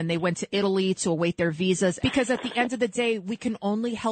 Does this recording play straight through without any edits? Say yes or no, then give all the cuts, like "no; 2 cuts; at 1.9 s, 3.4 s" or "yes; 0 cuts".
no; 1 cut; at 2.0 s